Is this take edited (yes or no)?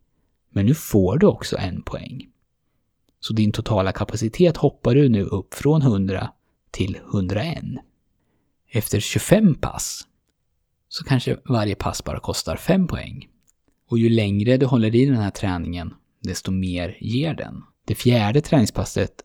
yes